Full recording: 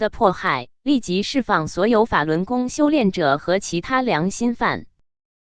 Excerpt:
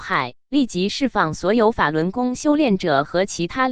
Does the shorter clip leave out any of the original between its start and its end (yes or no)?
no